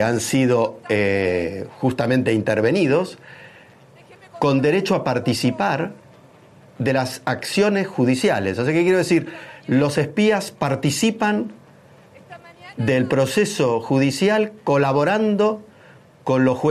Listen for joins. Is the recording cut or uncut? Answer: uncut